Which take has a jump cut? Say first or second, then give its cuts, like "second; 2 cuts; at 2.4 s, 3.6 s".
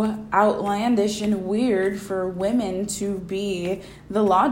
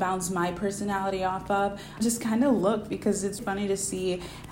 second; 2 cuts; at 2.0 s, 3.4 s